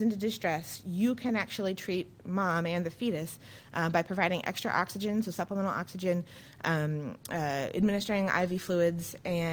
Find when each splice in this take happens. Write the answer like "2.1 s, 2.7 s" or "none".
none